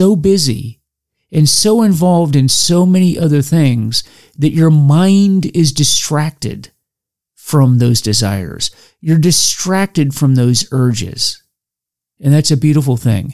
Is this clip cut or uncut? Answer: cut